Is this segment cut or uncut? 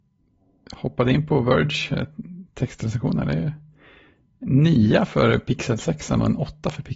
uncut